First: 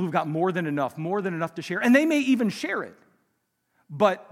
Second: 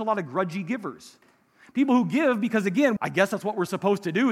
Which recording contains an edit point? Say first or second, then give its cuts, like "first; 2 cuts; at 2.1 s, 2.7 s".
second; 1 cut; at 3.0 s